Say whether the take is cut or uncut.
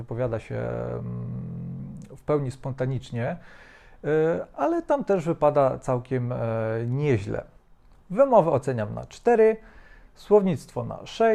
uncut